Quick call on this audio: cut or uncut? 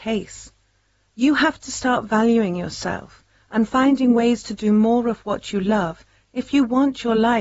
cut